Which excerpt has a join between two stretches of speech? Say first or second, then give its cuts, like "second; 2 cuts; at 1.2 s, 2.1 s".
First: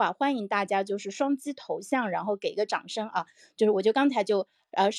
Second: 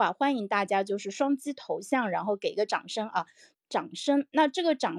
second; 1 cut; at 3.5 s